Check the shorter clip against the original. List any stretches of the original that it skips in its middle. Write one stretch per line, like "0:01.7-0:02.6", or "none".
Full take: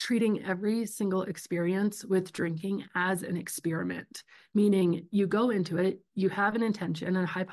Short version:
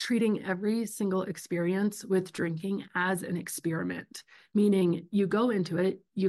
none

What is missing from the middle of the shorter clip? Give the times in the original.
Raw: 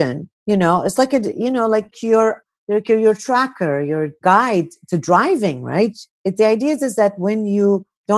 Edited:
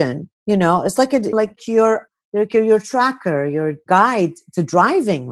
0:01.3-0:01.7

